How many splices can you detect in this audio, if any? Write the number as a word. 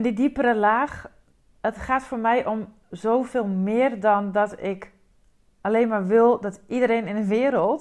zero